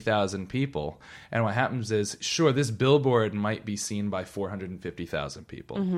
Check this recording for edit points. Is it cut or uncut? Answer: uncut